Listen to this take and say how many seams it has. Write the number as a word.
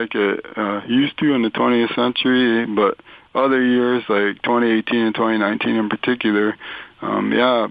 zero